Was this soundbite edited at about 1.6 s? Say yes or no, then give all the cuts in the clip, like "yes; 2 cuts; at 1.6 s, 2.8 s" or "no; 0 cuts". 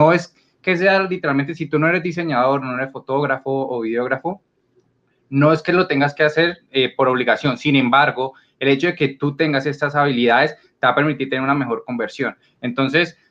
no; 1 cut; at 12.4 s